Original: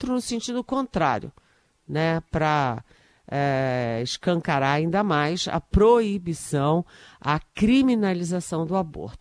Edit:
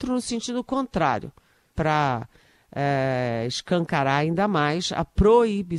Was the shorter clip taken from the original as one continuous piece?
no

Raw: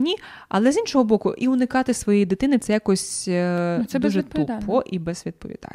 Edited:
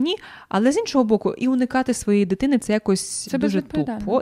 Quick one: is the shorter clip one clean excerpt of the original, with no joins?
no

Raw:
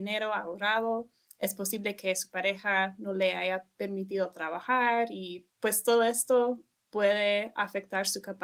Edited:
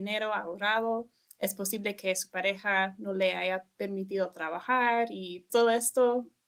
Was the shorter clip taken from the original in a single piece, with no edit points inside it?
no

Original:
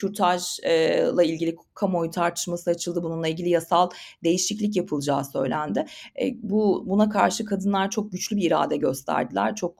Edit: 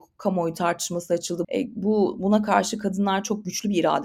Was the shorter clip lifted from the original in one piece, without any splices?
no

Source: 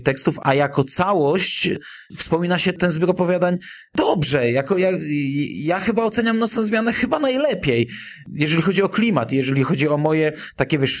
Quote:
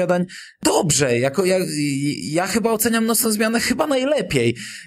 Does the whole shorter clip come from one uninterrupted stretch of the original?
yes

